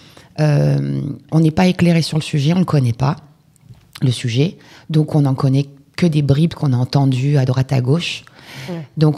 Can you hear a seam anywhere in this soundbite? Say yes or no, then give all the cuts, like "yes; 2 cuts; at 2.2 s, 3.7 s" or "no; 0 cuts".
no; 0 cuts